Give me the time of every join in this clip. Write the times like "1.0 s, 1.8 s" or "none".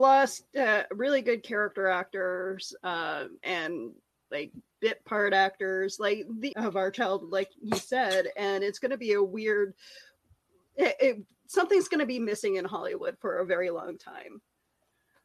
3.4 s, 6.5 s